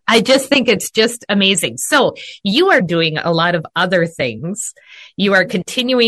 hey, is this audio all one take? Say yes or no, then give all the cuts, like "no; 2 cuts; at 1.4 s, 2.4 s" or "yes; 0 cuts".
no; 1 cut; at 2.8 s